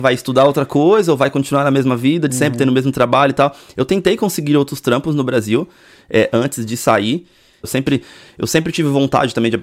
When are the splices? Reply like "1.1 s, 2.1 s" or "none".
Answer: 7.6 s